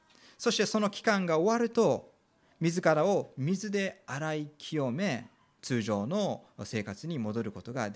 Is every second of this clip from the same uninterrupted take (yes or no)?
no